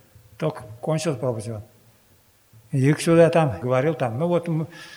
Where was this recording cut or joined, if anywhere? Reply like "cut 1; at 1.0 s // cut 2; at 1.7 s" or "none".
cut 1; at 3.6 s